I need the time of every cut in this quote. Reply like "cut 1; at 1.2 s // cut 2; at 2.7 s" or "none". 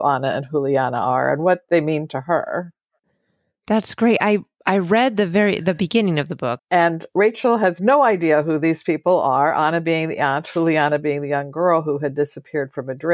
cut 1; at 6.6 s